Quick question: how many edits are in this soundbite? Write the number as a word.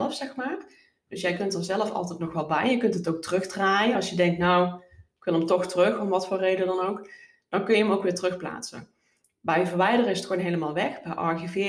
zero